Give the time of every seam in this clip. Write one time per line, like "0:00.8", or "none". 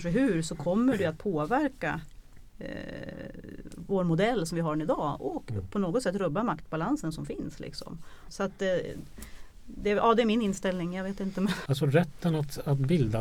0:08.3
0:11.7